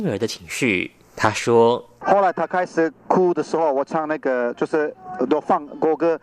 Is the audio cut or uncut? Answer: uncut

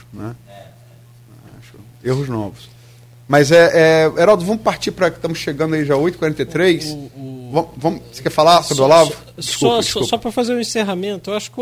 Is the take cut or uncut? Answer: uncut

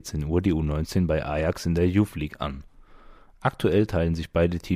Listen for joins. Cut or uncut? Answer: uncut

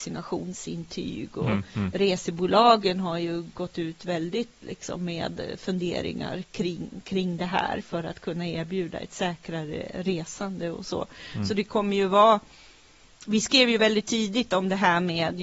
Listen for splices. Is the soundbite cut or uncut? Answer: uncut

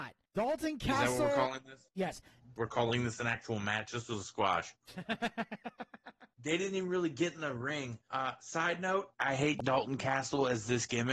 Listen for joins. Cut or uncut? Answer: cut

